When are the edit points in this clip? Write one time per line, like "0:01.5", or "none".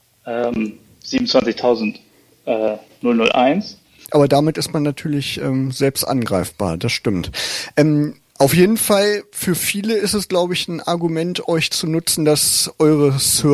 0:04.1